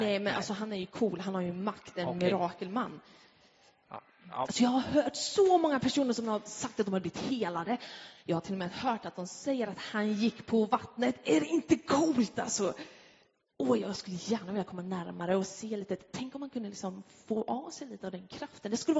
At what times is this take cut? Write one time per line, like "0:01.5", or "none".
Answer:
0:04.5